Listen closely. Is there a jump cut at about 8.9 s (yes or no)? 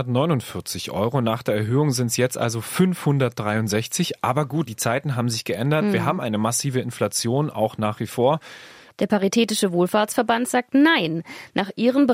yes